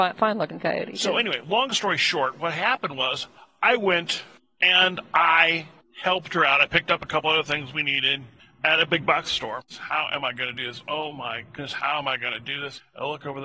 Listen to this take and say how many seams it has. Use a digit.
1